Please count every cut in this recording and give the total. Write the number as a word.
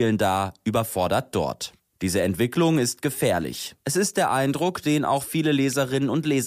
one